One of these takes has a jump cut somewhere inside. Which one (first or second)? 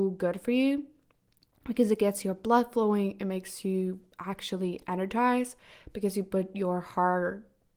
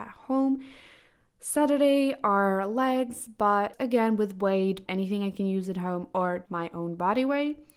second